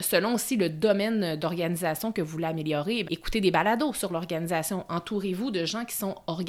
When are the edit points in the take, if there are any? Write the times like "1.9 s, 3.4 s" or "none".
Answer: 3.0 s